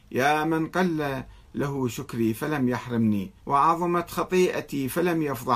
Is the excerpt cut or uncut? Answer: cut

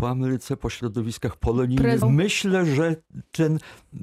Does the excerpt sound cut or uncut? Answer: cut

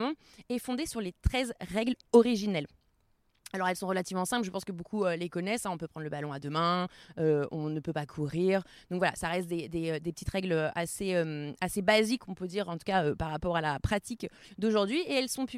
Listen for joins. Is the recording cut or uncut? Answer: uncut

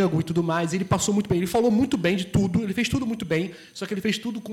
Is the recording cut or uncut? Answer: uncut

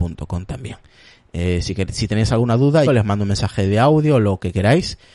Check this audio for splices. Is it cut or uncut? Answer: cut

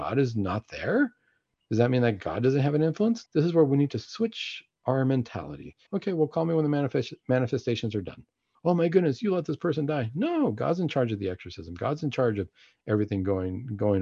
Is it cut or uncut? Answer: cut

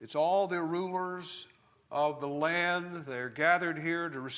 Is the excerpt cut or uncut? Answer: uncut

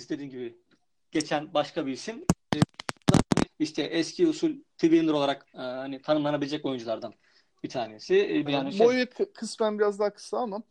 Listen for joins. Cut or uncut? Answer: cut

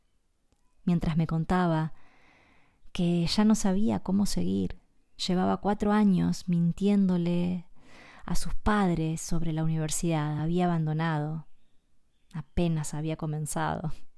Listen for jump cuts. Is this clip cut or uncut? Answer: uncut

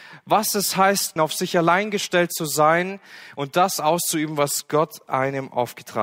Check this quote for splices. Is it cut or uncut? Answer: cut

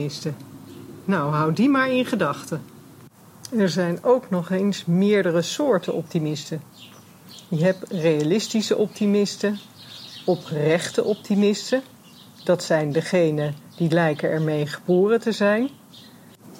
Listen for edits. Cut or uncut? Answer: uncut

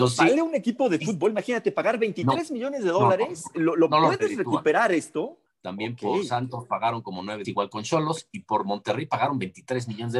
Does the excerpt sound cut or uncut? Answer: cut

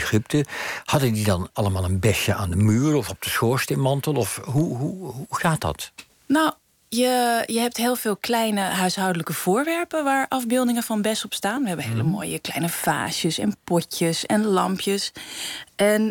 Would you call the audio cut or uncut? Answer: uncut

